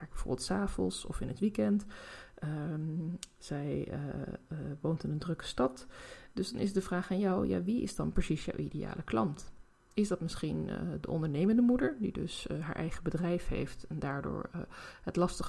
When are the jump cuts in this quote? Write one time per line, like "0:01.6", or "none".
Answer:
0:06.3